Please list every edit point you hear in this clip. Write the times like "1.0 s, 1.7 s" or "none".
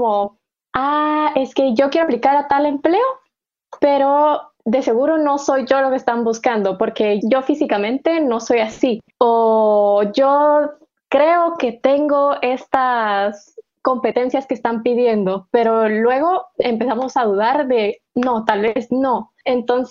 none